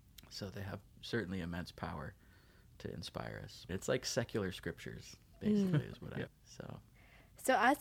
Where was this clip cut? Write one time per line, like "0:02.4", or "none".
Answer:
0:03.7
0:06.3